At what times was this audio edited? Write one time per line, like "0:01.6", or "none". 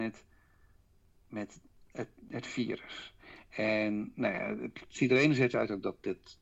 none